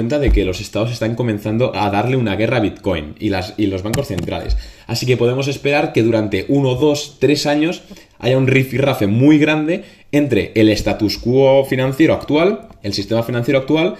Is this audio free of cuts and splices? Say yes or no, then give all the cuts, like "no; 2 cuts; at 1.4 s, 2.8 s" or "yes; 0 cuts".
yes; 0 cuts